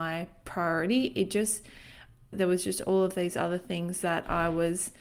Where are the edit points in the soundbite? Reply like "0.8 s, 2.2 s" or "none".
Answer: 2.3 s